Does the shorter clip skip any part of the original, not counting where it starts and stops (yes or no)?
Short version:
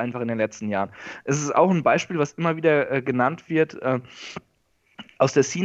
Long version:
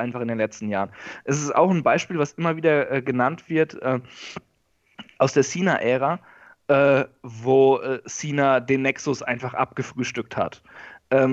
no